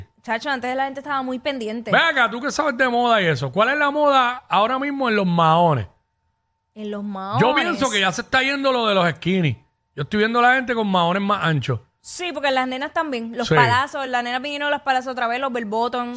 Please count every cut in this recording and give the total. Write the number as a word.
zero